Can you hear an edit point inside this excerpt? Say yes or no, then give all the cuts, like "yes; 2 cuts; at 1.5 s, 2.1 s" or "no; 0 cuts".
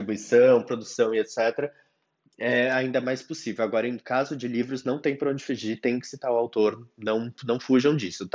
no; 0 cuts